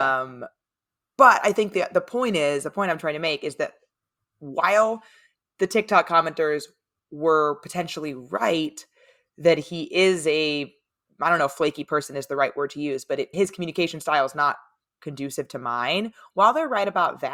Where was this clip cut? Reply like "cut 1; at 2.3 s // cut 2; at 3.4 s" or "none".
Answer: cut 1; at 13.3 s